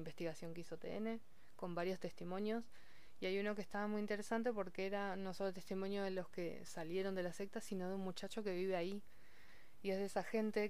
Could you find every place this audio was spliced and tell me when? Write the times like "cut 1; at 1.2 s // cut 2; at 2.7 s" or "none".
none